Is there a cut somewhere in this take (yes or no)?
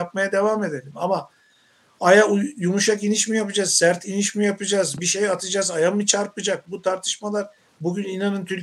no